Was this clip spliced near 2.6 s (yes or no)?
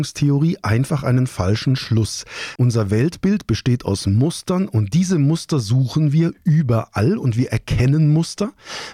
yes